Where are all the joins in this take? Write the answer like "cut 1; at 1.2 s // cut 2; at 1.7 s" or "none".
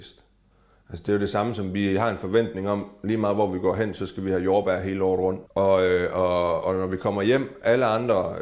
cut 1; at 5.5 s // cut 2; at 6.6 s

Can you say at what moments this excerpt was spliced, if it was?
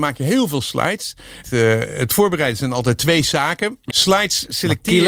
cut 1; at 1.4 s // cut 2; at 3.9 s

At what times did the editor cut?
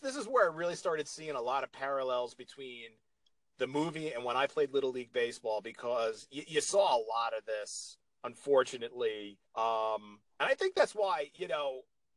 cut 1; at 9.5 s

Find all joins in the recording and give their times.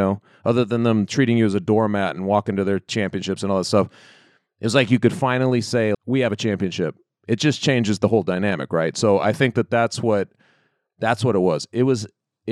cut 1; at 5.9 s

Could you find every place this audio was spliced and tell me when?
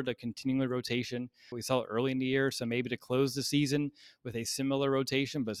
cut 1; at 1.5 s

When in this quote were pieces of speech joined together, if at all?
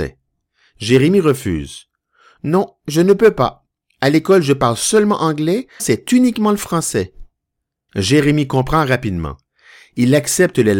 cut 1; at 5.8 s // cut 2; at 7.9 s

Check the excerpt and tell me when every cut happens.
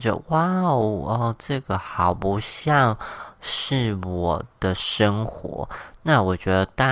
none

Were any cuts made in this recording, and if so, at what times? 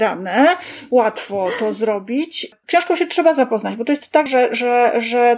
cut 1; at 2.6 s // cut 2; at 4.3 s

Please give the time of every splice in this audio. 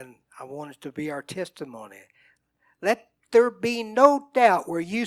none

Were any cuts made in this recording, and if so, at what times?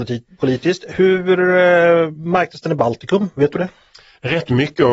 none

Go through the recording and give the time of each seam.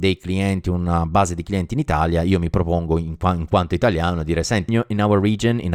cut 1; at 4.7 s

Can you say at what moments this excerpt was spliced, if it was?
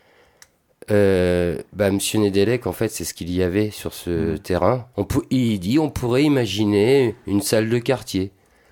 cut 1; at 4.9 s

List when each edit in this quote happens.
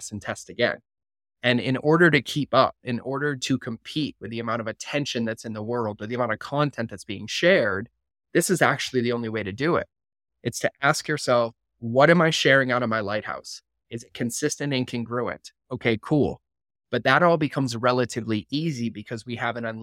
cut 1; at 16.7 s

